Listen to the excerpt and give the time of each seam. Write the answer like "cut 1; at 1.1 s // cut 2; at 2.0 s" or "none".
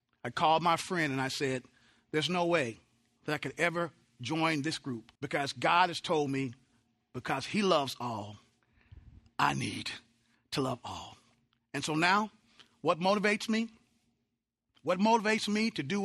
cut 1; at 5.2 s